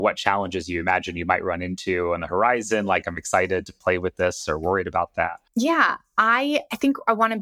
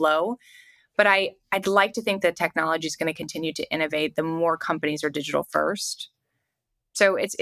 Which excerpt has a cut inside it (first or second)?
first